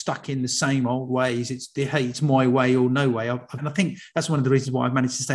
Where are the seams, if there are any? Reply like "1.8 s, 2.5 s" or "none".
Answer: 3.6 s